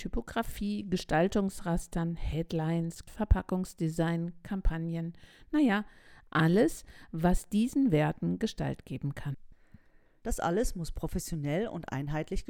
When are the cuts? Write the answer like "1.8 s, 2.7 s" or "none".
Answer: 3.1 s, 10.2 s